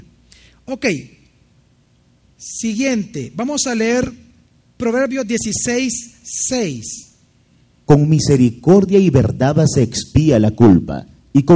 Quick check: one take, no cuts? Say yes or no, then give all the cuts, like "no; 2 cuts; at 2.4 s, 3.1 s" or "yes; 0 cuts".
yes; 0 cuts